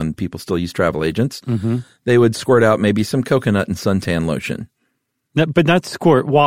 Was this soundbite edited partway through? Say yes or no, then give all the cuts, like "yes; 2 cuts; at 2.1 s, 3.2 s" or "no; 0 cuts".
no; 0 cuts